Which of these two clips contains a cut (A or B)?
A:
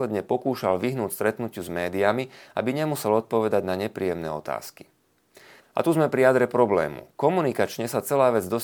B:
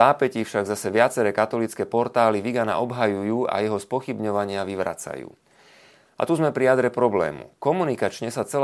A